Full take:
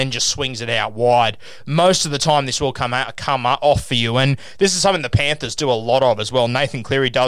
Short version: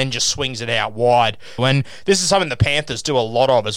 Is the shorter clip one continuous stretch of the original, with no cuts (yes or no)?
no